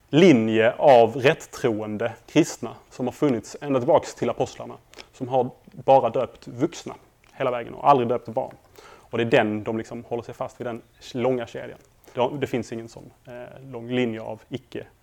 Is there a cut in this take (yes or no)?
yes